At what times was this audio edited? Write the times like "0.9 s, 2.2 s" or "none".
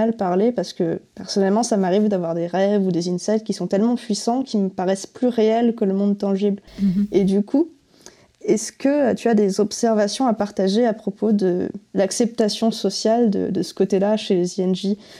6.7 s